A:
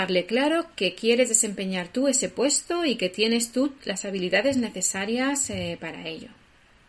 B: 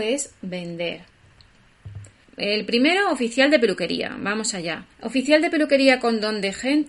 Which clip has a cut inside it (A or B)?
B